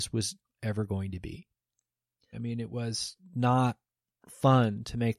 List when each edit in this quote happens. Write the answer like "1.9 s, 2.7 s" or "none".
2.3 s